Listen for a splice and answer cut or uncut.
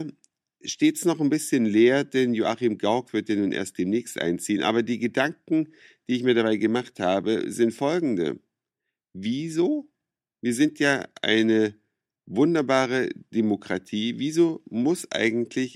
uncut